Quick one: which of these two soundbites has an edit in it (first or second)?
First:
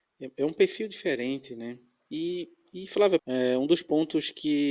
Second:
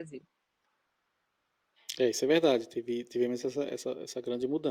first